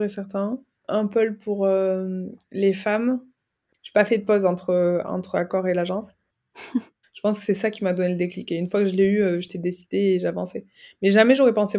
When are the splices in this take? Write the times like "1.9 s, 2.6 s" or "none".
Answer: 3.7 s, 7.0 s

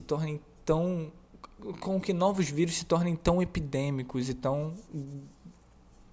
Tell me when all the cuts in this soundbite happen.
none

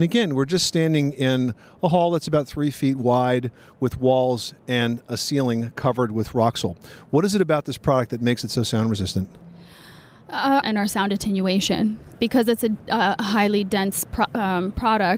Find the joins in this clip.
10.6 s

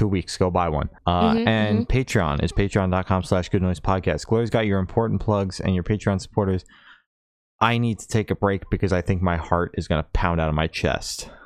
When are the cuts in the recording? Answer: 1.0 s

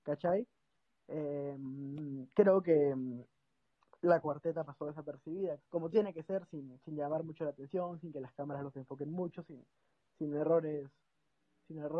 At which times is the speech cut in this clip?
5.6 s

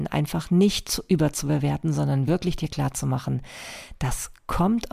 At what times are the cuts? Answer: none

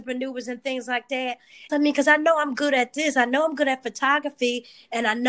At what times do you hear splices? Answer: 1.7 s

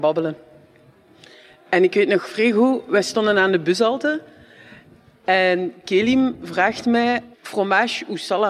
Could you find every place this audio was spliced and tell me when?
7.3 s

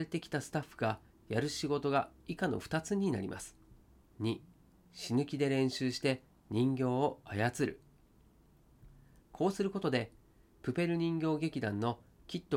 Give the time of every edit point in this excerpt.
4.1 s, 9.2 s

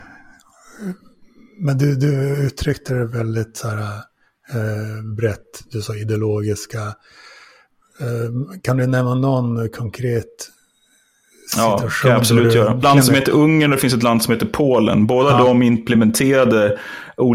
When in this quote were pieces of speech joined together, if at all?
12.8 s

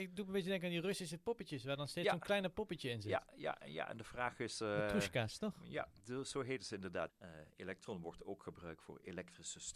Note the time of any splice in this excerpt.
7.1 s

